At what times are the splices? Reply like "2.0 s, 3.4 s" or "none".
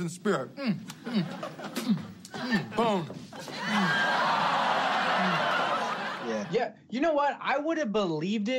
none

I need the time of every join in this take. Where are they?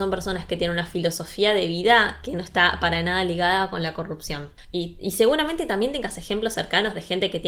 none

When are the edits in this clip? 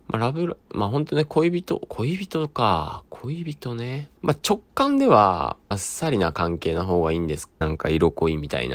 4.2 s, 5.7 s, 7.6 s

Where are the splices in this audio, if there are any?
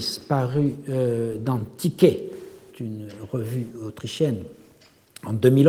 2.7 s

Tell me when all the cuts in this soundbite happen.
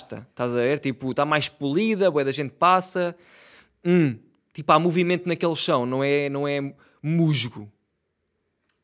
none

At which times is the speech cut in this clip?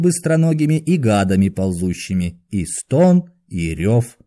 none

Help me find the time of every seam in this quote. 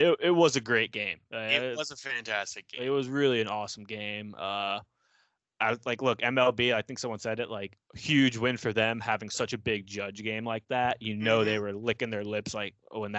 none

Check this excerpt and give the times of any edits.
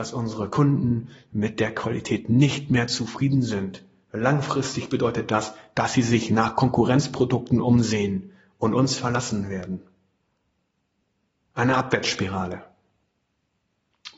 none

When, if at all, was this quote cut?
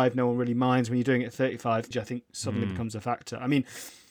1.9 s

